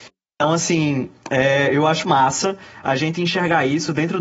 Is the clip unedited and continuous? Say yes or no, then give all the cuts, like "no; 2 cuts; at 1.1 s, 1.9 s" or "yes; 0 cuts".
no; 1 cut; at 2.0 s